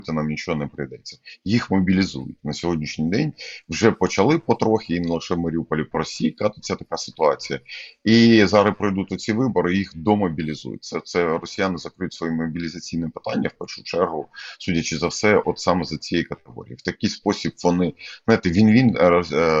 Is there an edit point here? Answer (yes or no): no